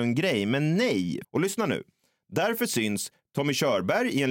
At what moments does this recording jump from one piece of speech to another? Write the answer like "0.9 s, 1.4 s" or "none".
1.2 s

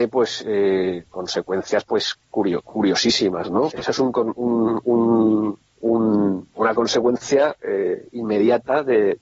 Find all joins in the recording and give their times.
3.7 s, 6.5 s

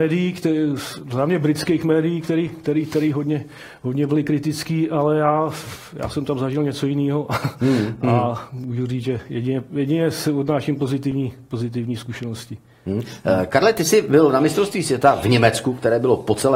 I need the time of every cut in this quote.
none

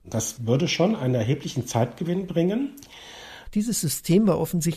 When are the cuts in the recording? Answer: 3.4 s

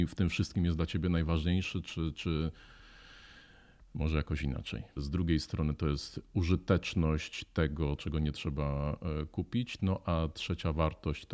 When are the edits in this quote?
5.0 s, 8.0 s

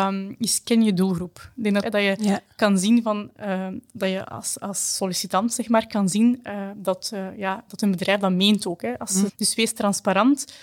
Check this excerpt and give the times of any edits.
1.8 s, 9.3 s

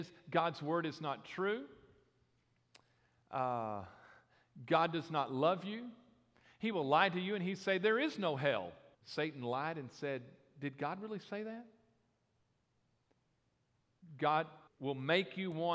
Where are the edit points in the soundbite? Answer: 8.9 s, 14.7 s

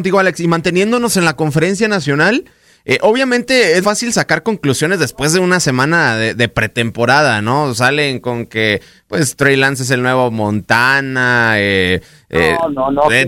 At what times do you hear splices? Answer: 3.8 s

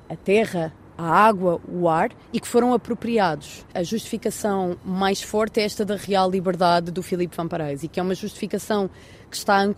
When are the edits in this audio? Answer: 3.7 s

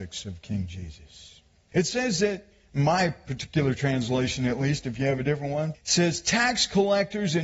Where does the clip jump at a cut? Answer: 1.7 s, 5.7 s

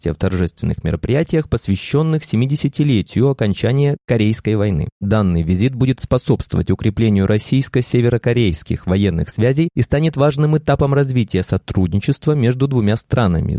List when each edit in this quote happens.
4.9 s

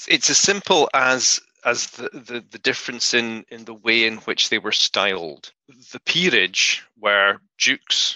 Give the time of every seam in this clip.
none

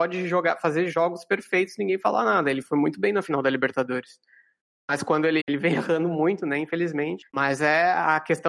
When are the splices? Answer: 5.4 s, 7.3 s

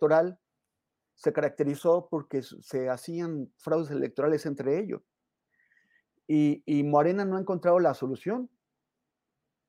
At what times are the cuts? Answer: none

